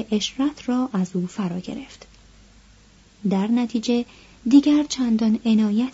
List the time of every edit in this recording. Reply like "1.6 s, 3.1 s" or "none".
none